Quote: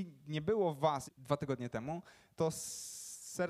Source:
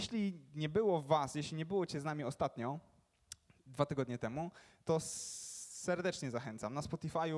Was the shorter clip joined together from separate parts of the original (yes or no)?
yes